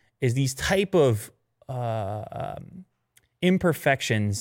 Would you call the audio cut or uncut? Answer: uncut